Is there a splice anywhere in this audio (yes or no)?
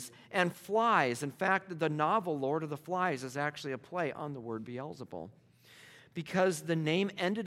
no